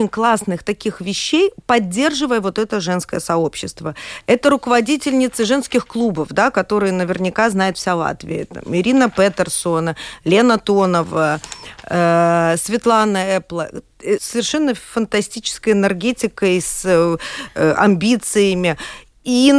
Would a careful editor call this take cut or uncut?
cut